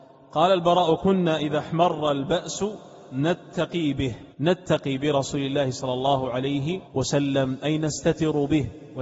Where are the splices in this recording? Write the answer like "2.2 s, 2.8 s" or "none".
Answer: 4.3 s, 6.9 s